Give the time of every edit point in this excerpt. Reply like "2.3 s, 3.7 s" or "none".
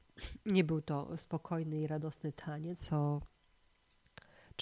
2.8 s